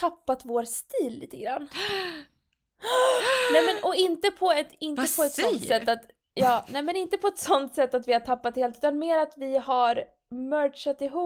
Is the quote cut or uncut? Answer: uncut